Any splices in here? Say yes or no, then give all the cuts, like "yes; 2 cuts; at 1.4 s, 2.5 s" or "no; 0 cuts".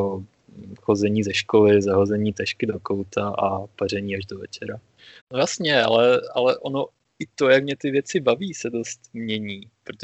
yes; 1 cut; at 5.2 s